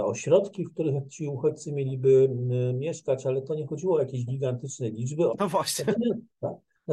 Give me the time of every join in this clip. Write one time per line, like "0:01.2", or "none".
0:05.3